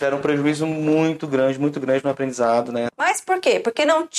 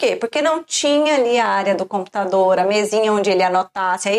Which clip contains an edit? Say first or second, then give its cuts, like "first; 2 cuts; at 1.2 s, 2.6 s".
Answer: first; 1 cut; at 2.9 s